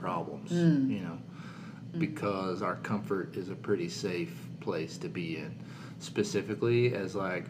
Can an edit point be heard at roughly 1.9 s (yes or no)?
yes